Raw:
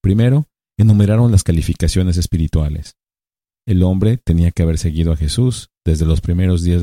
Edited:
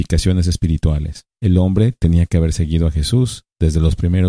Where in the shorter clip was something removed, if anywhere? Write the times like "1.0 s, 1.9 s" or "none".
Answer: 1.3 s